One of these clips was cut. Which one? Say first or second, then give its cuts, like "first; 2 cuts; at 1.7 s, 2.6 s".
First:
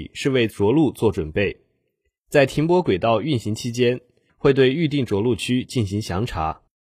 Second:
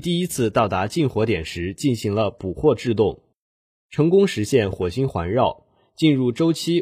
first; 1 cut; at 4.3 s